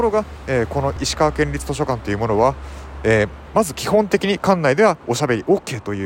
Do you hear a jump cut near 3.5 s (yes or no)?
no